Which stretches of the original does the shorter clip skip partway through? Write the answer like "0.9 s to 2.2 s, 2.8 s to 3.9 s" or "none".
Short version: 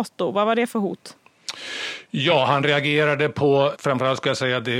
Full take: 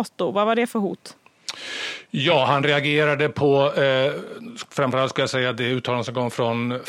3.7 s to 4.7 s